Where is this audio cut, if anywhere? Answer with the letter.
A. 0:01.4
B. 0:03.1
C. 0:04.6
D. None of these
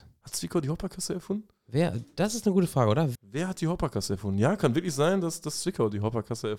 B